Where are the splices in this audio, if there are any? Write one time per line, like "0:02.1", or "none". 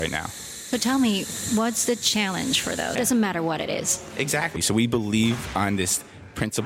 0:03.0
0:04.6